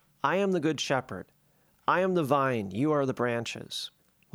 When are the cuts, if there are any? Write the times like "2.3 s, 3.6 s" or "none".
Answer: none